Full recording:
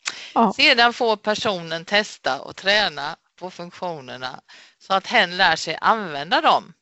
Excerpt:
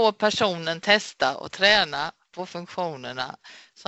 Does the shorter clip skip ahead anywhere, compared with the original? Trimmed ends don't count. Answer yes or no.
no